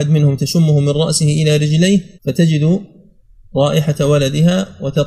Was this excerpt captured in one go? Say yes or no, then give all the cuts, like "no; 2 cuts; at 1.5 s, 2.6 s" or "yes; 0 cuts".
no; 1 cut; at 2.1 s